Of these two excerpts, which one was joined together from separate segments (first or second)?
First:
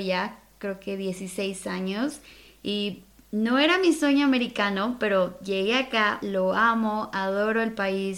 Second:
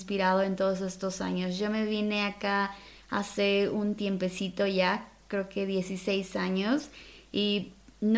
first